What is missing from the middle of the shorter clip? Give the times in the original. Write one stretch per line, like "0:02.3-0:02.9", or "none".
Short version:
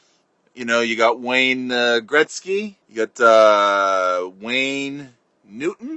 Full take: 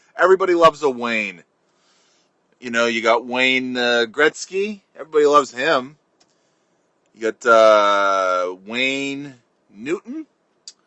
0:04.9-0:07.1